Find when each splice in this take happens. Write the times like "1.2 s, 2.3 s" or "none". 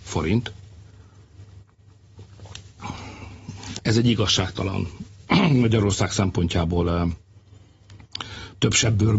3.8 s